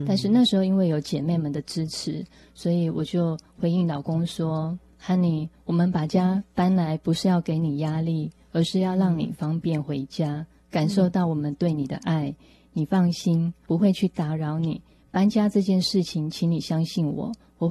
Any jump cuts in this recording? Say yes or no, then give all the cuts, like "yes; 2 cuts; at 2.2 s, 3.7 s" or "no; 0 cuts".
yes; 1 cut; at 13.7 s